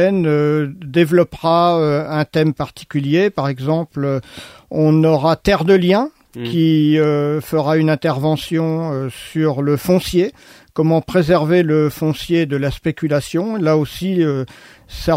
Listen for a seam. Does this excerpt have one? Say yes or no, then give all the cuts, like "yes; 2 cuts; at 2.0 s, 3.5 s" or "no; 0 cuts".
no; 0 cuts